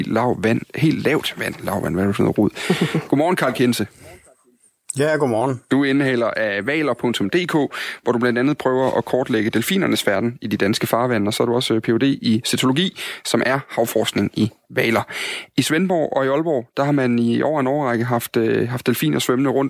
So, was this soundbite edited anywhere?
no; 0 cuts

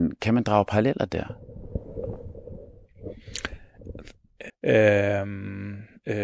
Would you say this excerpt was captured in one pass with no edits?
no; 1 cut; at 4.5 s

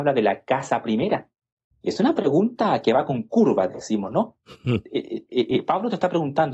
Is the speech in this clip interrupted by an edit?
yes; 1 cut; at 1.7 s

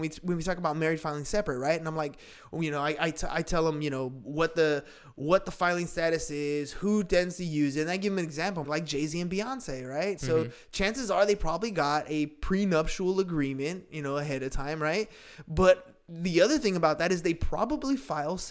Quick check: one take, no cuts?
no; 2 cuts; at 8.6 s, 10.2 s

